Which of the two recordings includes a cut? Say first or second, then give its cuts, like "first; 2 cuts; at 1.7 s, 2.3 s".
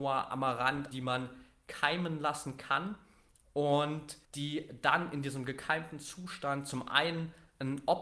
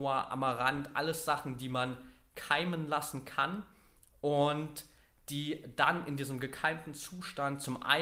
first; 2 cuts; at 0.9 s, 4.2 s